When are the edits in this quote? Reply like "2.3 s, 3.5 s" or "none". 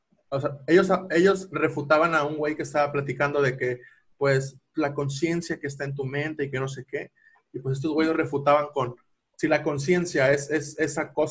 none